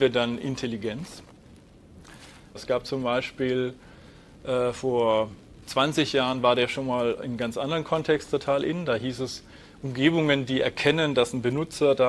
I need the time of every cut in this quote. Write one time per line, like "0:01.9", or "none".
0:02.5